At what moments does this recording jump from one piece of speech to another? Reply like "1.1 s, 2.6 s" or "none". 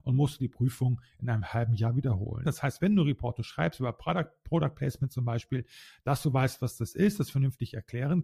2.4 s